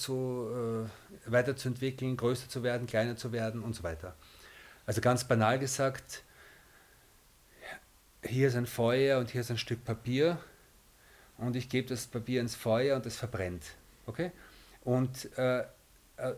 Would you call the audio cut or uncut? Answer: uncut